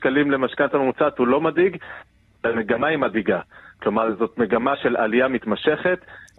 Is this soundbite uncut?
yes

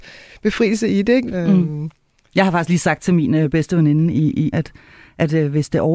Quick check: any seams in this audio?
yes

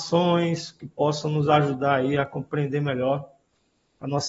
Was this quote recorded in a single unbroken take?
yes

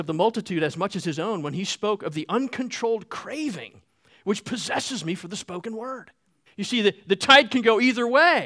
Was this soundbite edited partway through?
yes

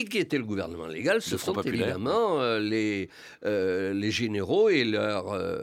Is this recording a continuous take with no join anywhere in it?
yes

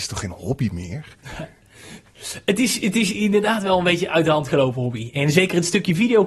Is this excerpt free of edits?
yes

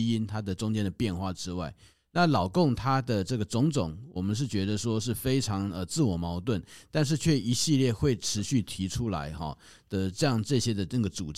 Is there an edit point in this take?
no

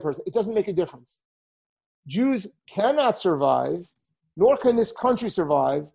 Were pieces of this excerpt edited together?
no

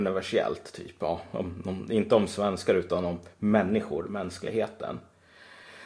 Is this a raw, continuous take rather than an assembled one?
yes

